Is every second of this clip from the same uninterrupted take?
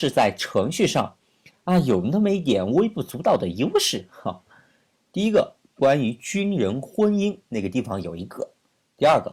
no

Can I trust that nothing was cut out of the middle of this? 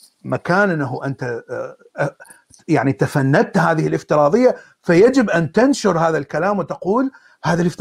yes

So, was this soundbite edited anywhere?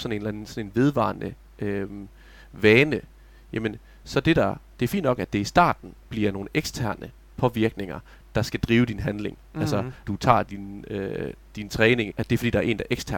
yes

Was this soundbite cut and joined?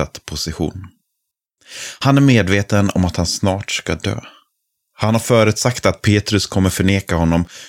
no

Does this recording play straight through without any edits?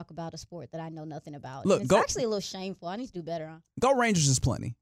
yes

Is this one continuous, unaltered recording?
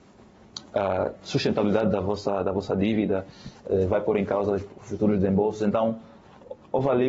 yes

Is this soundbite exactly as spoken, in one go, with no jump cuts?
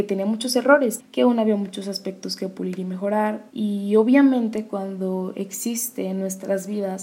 no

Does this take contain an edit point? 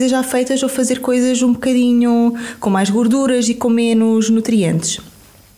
no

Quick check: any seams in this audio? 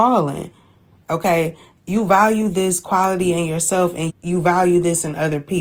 yes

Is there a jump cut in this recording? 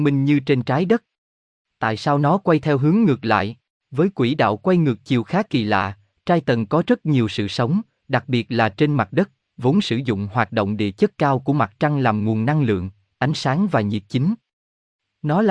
yes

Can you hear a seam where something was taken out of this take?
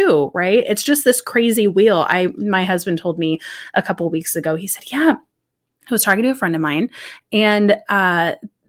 no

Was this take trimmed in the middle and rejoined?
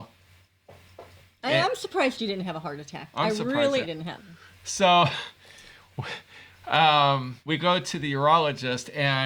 yes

